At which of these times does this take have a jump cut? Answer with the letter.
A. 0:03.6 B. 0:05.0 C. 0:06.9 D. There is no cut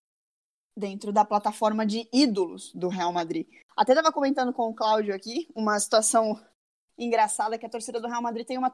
A